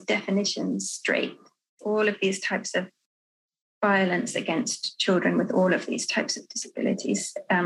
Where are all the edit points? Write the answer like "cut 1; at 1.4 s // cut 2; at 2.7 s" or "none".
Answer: cut 1; at 1.8 s